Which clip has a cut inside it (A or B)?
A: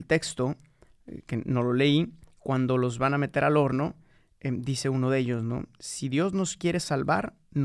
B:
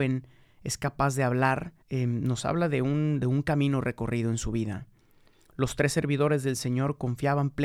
B